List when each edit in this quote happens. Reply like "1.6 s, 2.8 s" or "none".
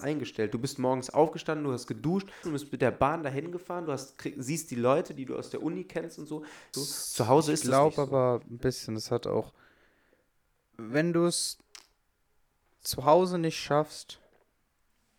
2.4 s, 6.7 s